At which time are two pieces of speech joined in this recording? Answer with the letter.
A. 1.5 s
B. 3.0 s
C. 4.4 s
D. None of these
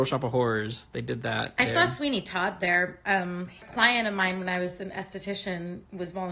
D